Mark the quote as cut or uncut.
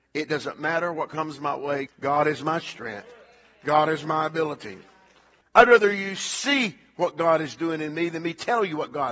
cut